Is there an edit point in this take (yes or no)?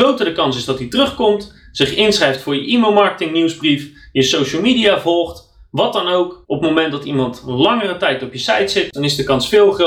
yes